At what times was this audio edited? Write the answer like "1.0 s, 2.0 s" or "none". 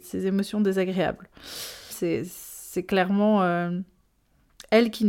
1.9 s